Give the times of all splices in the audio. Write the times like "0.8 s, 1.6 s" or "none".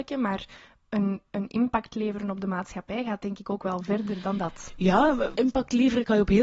4.2 s, 5.3 s